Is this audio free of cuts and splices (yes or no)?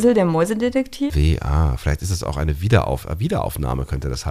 no